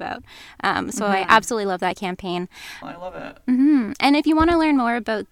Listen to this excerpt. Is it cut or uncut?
cut